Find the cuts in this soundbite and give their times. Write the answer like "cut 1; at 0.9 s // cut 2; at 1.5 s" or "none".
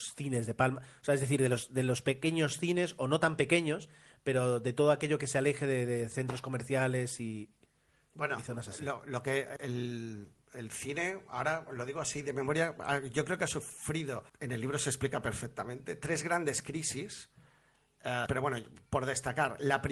cut 1; at 9.6 s // cut 2; at 14.3 s // cut 3; at 18.3 s